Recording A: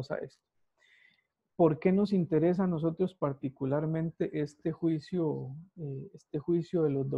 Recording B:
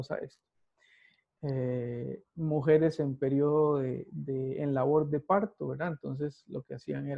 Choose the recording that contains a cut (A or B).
B